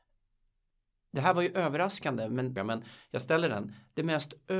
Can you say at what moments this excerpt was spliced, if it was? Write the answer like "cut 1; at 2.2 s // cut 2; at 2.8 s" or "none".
cut 1; at 2.6 s